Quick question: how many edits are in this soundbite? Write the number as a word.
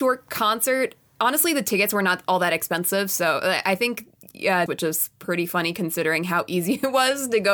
one